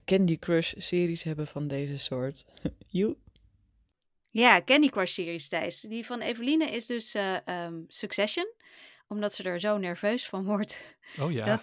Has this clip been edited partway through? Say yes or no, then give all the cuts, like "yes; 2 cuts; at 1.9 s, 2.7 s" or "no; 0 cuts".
no; 0 cuts